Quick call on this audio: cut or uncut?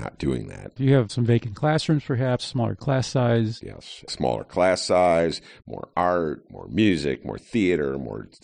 uncut